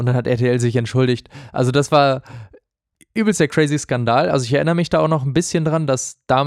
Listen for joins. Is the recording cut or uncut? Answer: uncut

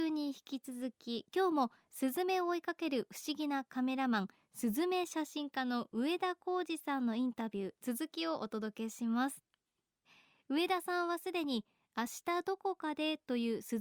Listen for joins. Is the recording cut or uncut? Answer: uncut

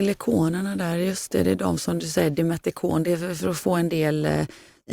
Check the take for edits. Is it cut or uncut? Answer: uncut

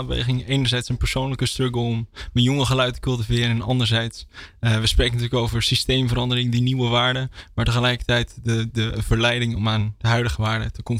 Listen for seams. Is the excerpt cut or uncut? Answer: uncut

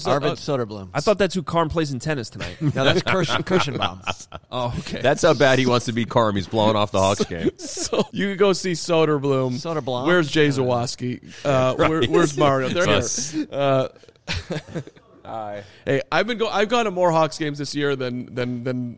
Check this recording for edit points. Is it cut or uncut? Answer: cut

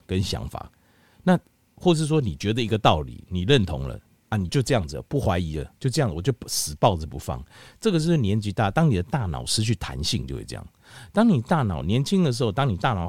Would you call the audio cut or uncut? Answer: cut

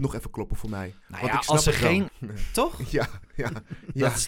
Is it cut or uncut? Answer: cut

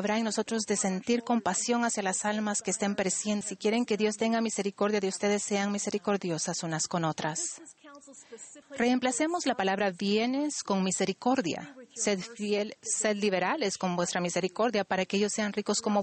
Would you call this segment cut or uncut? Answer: cut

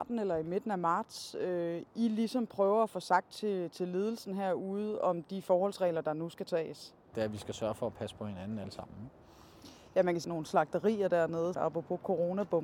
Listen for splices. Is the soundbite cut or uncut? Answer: cut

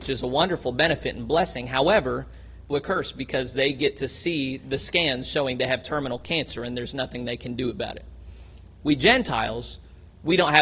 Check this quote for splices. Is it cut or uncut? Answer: cut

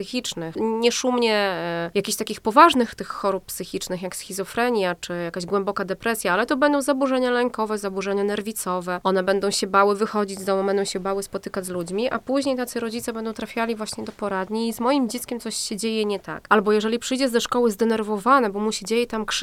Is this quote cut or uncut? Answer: cut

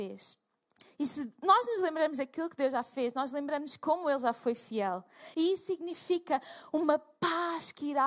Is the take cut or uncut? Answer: cut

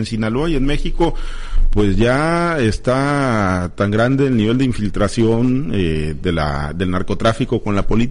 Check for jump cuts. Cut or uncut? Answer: uncut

